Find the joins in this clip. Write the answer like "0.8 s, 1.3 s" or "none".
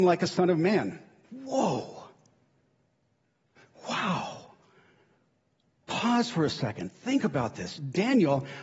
1.2 s